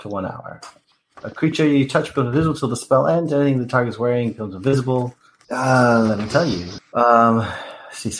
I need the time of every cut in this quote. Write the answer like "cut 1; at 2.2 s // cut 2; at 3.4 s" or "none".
cut 1; at 5.4 s // cut 2; at 6.8 s